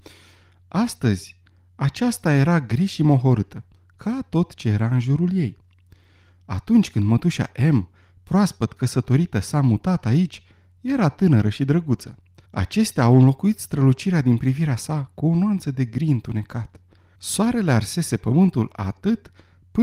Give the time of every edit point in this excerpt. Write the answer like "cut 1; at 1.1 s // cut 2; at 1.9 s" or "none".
cut 1; at 12.5 s // cut 2; at 17.2 s